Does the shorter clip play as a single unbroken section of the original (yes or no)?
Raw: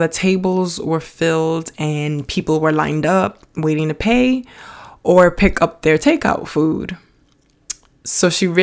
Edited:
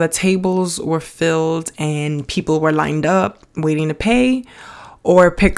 yes